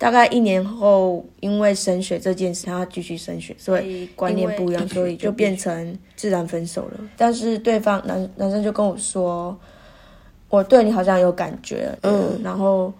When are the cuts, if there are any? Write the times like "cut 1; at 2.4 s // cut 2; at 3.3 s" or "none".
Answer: cut 1; at 2.6 s // cut 2; at 7.1 s // cut 3; at 12.0 s